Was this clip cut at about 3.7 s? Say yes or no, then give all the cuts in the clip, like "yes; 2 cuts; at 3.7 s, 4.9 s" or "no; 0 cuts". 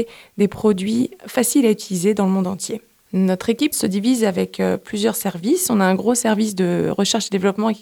yes; 1 cut; at 3.7 s